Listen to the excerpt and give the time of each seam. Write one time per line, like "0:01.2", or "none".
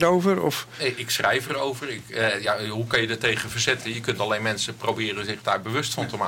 none